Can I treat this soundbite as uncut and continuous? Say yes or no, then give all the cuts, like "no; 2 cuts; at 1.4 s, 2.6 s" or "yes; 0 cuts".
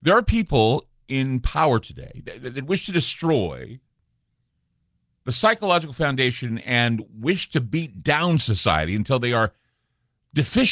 yes; 0 cuts